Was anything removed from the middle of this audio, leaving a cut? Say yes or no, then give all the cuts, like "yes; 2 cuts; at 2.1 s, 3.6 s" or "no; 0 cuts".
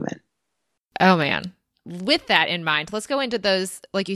no; 0 cuts